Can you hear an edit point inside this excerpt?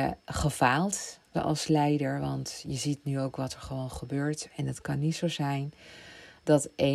yes; 2 cuts; at 1.3 s, 4.5 s

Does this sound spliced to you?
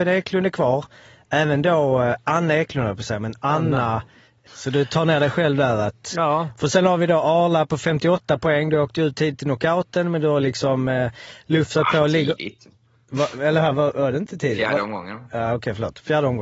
yes; 1 cut; at 4.5 s

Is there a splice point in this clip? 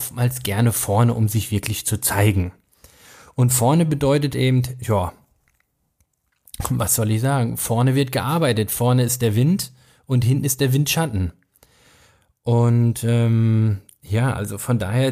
yes; 1 cut; at 4.3 s

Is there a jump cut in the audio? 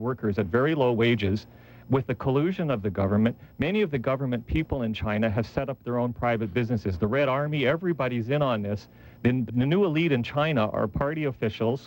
yes; 1 cut; at 9.5 s

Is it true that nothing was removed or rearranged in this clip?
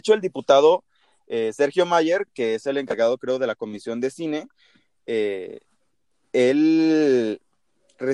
yes; 0 cuts

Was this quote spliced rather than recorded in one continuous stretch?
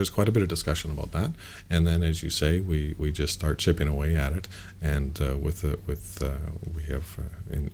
no; 0 cuts

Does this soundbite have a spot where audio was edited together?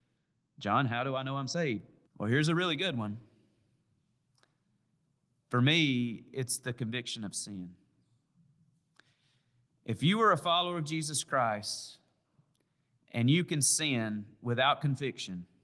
yes; 1 cut; at 2.1 s

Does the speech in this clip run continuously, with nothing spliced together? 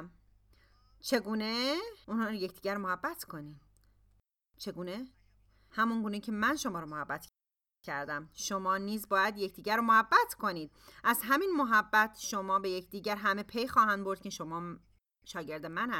yes; 0 cuts

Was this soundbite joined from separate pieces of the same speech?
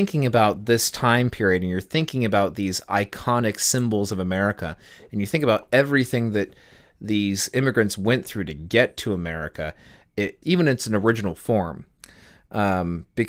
yes; 1 cut; at 10.4 s

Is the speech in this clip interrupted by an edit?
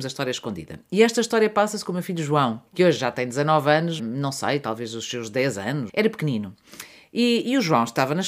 yes; 3 cuts; at 2.7 s, 4.0 s, 5.9 s

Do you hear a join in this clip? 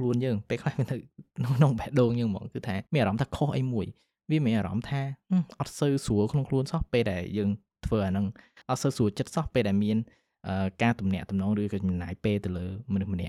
yes; 2 cuts; at 1.3 s, 2.9 s

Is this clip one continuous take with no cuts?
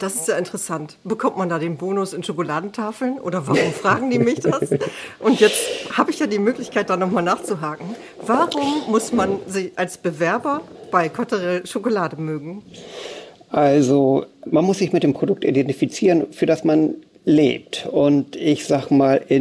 yes; 0 cuts

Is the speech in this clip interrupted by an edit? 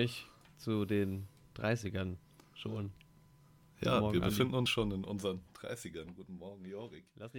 no; 0 cuts

